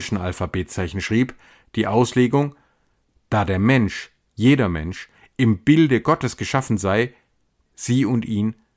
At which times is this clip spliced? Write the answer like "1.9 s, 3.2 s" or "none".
7.7 s